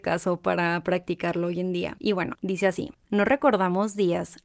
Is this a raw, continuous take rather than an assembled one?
yes; 0 cuts

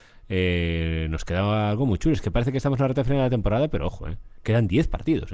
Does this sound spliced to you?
no; 0 cuts

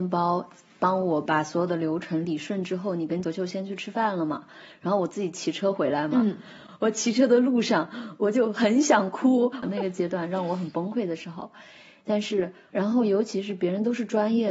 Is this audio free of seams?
no; 3 cuts; at 3.2 s, 9.6 s, 12.7 s

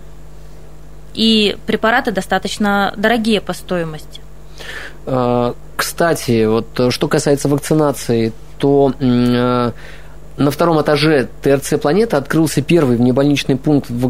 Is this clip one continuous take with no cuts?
yes; 0 cuts

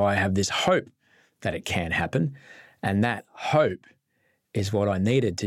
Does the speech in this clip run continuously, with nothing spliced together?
yes; 0 cuts

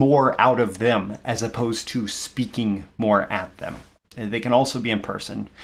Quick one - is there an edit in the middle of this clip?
yes; 1 cut; at 4.0 s

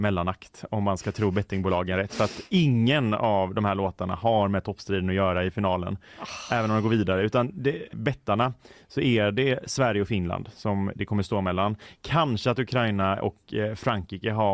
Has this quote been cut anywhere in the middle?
yes; 1 cut; at 7.9 s

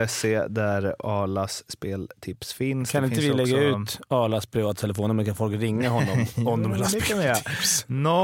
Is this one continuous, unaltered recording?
yes; 0 cuts

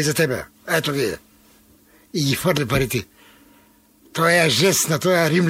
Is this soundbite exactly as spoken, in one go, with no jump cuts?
yes; 0 cuts

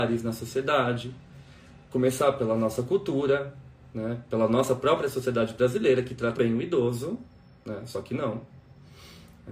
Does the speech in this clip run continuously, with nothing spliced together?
no; 1 cut; at 6.3 s

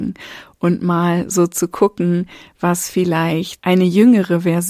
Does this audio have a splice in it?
yes; 1 cut; at 3.6 s

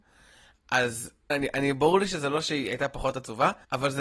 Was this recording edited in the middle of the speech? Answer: yes; 1 cut; at 1.3 s

